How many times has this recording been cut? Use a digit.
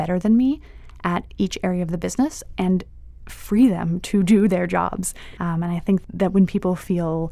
1